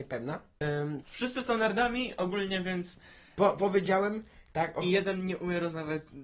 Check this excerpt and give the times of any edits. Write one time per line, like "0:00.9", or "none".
0:01.0

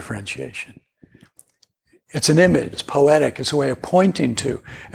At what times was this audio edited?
0:02.7

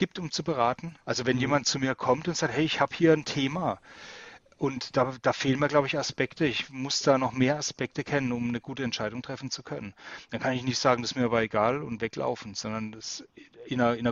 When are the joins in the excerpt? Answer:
0:01.0

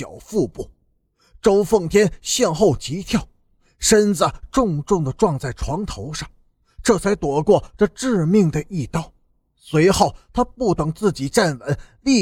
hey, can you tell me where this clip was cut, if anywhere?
none

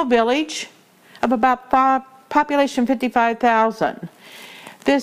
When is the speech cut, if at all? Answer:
none

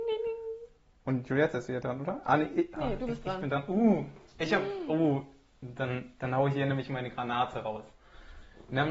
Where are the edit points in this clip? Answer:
none

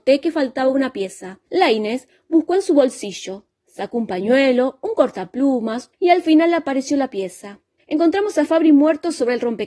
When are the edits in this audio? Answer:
0:01.5
0:05.9
0:07.8

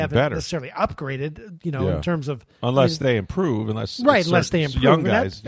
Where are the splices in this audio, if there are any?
none

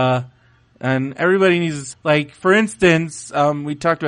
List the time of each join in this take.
0:01.9

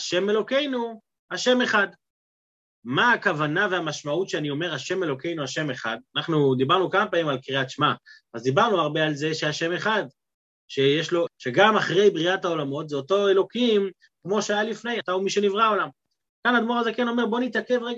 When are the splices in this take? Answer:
0:11.3
0:15.0

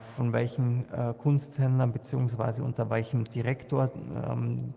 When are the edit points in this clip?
none

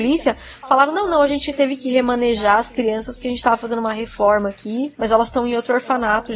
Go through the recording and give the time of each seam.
none

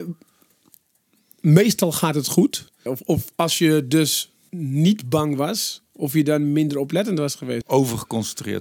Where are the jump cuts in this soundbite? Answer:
0:02.9
0:04.5
0:07.6

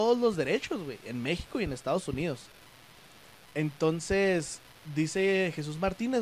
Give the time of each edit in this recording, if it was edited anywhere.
none

